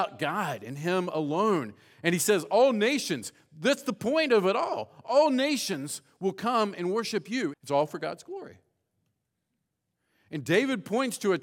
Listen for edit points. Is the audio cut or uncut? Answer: cut